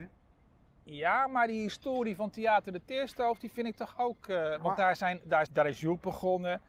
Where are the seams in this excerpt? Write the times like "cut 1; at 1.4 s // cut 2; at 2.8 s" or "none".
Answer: cut 1; at 5.5 s